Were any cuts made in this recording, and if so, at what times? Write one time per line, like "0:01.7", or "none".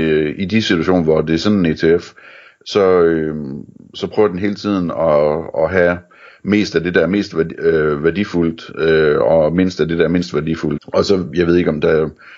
0:10.8